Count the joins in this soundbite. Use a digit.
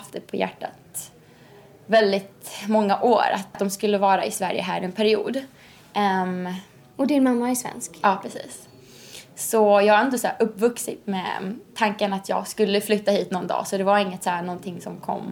1